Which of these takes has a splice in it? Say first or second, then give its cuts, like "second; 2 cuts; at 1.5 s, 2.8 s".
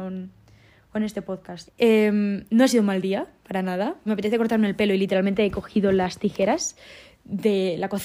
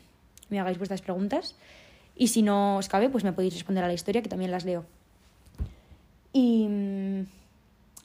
first; 2 cuts; at 1.7 s, 4.1 s